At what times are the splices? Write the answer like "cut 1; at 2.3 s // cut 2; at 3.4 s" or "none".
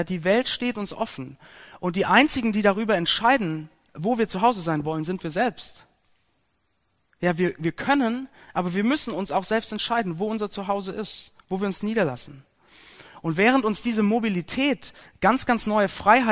none